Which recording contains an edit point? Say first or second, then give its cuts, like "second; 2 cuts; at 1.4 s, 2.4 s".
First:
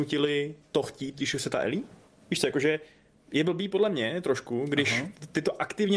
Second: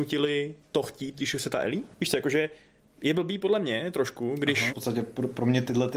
second; 2 cuts; at 1.9 s, 4.7 s